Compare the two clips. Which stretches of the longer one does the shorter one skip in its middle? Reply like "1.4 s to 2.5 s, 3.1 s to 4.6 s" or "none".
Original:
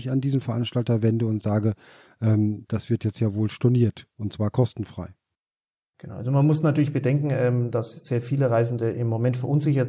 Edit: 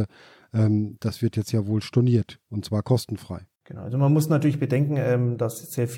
5.2 s to 5.9 s